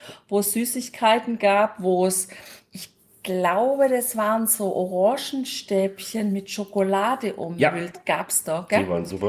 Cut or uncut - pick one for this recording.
uncut